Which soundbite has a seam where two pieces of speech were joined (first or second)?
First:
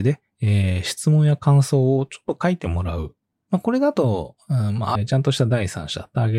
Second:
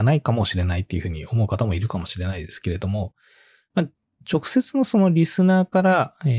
first